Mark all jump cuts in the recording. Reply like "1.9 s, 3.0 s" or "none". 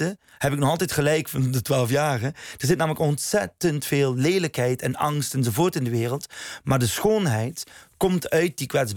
none